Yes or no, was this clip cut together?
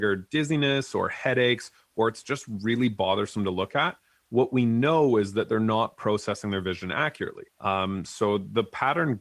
yes